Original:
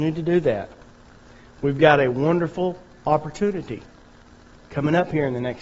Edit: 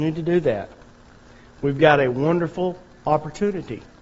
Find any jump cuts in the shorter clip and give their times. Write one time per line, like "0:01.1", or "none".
none

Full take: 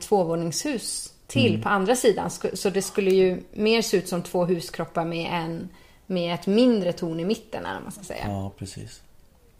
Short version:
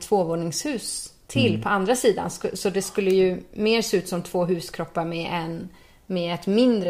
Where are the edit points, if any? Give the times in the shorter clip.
none

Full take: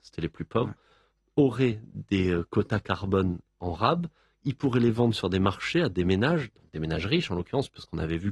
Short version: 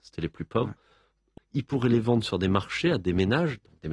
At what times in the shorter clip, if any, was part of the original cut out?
0:01.4

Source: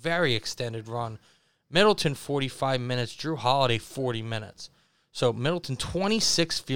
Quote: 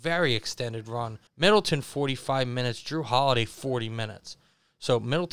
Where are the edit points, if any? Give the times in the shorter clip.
0:01.3

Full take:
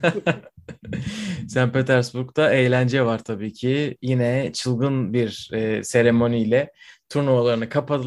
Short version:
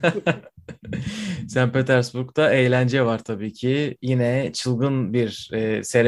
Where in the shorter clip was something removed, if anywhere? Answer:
none

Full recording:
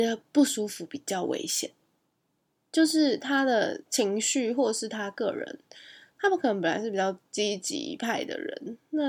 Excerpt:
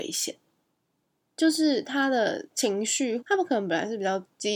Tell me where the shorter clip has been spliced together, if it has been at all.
0:03.2

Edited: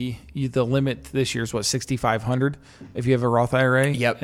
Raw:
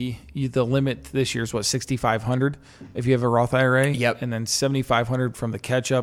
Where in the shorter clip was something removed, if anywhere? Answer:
none

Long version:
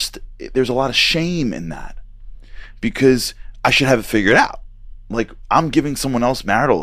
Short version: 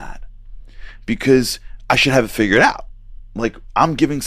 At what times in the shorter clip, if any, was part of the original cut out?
none

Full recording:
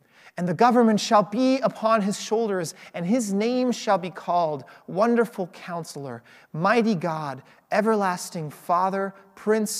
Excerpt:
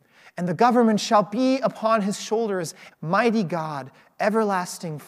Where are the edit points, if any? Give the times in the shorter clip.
0:02.9

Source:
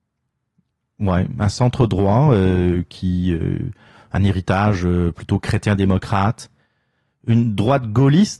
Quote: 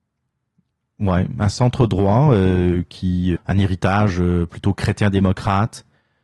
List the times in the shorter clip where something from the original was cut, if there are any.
0:03.4

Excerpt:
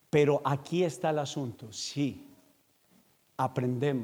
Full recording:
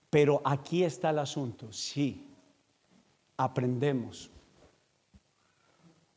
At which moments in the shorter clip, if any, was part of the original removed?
none

